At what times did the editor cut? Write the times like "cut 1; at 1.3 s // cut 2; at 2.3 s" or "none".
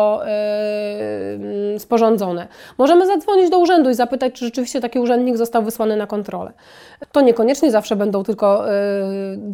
cut 1; at 7.0 s